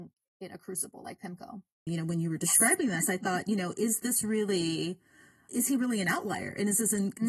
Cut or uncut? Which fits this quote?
cut